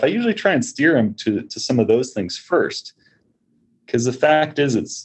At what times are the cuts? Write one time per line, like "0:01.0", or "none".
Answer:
none